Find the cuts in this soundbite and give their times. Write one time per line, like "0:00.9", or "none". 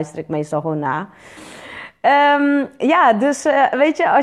0:01.4